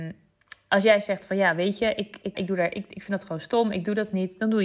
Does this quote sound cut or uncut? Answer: cut